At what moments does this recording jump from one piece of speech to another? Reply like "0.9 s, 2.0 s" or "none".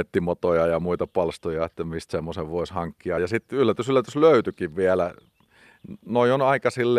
none

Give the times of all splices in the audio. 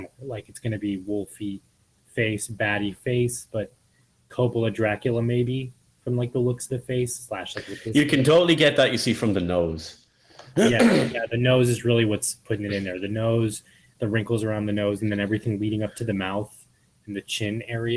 none

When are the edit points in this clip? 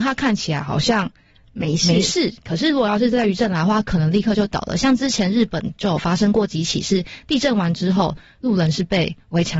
none

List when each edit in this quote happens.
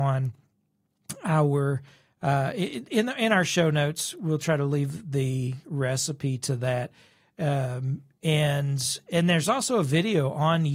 none

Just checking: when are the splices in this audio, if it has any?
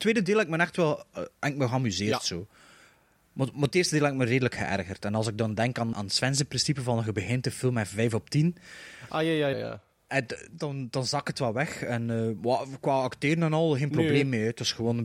5.9 s, 9.5 s

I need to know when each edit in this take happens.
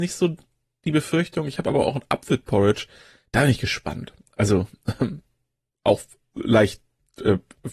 none

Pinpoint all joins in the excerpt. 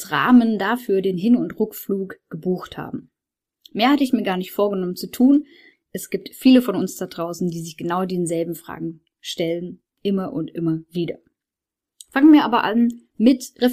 5.7 s

